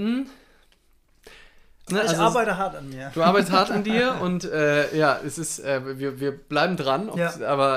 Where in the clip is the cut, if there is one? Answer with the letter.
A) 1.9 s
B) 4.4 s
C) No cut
A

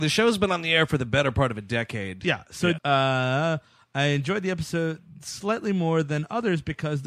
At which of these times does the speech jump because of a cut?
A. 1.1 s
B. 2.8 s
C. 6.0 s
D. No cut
B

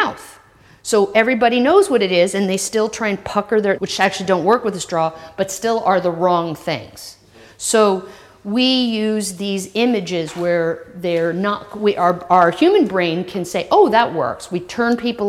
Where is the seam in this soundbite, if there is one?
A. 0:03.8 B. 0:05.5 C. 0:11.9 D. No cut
A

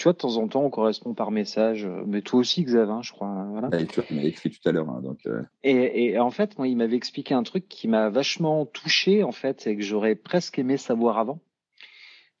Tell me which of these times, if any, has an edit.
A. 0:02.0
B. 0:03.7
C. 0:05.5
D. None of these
C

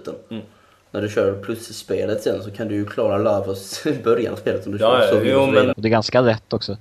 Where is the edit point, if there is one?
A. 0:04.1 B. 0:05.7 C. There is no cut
B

